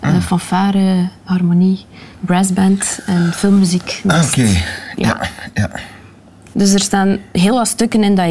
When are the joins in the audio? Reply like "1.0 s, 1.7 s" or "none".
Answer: 6.5 s

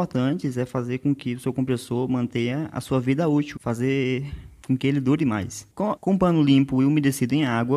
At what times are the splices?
3.6 s, 6.0 s

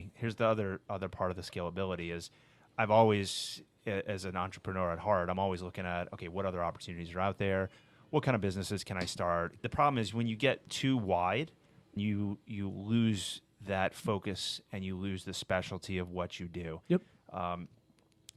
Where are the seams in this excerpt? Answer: 9.6 s, 12.0 s

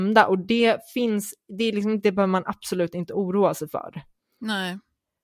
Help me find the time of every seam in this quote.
2.0 s

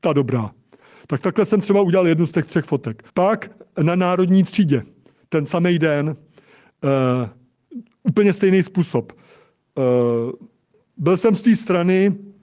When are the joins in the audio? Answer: 3.1 s

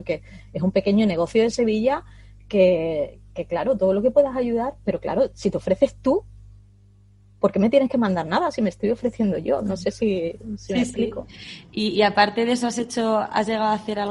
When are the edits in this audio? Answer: none

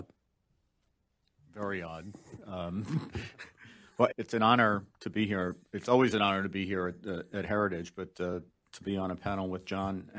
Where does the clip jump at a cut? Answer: 4.1 s

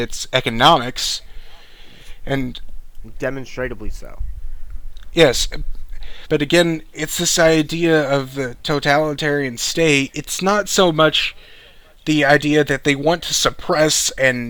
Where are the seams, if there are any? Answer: 6.3 s

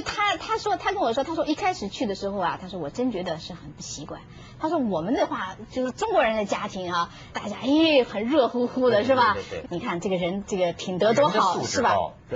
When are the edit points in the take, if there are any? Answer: 7.3 s, 9.6 s

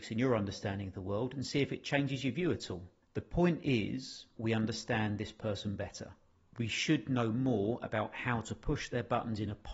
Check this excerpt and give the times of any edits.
4.4 s

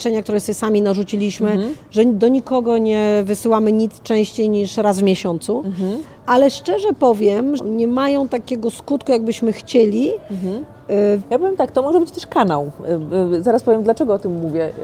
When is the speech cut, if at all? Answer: 7.6 s, 11.2 s

